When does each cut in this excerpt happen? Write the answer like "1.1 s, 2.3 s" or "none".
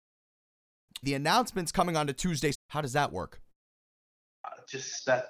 1.0 s, 2.5 s